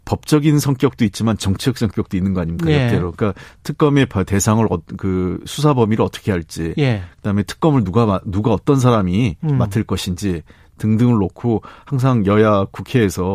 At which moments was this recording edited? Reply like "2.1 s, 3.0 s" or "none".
none